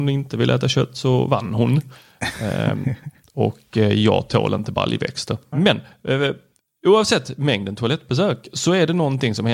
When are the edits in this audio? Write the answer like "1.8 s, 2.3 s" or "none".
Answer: 5.5 s